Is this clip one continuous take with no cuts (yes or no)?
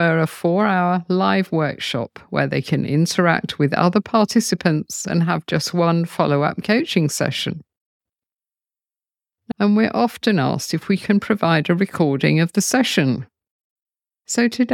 no